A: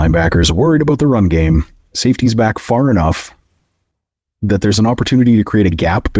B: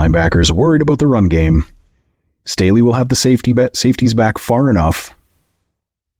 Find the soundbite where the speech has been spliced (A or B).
A